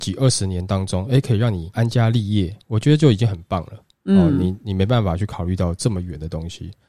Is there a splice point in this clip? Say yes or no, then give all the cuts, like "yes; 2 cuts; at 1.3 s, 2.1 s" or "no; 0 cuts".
no; 0 cuts